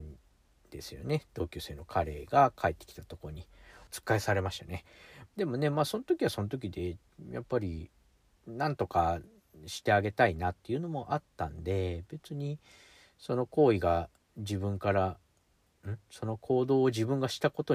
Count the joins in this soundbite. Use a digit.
2